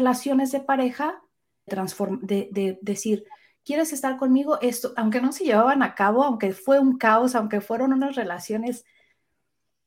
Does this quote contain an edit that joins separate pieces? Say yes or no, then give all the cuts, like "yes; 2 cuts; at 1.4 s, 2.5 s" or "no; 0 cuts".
yes; 2 cuts; at 1.7 s, 5.0 s